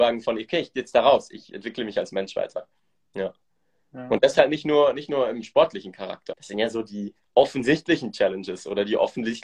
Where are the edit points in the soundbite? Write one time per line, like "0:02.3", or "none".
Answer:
0:06.3